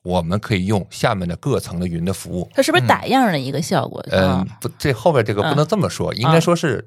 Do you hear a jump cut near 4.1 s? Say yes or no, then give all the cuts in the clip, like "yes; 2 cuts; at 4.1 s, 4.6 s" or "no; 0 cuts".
yes; 2 cuts; at 2.5 s, 4.1 s